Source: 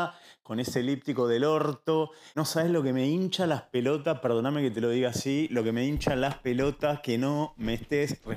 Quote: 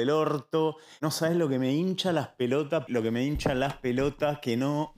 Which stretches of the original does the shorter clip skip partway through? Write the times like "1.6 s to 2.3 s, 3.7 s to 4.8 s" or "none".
4.2 s to 5.5 s